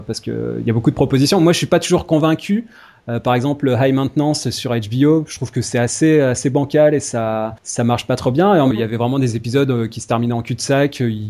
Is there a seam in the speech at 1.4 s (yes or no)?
no